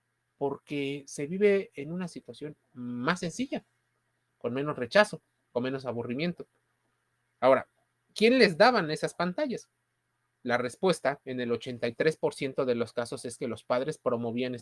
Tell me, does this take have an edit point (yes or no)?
no